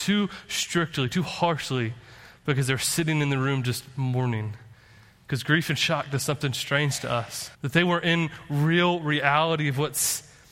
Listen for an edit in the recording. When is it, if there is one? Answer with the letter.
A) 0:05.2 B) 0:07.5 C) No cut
B